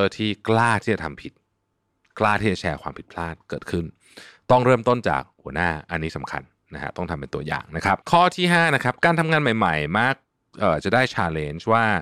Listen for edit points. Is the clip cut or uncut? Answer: cut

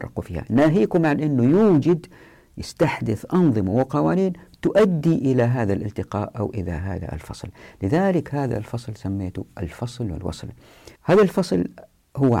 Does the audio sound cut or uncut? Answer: cut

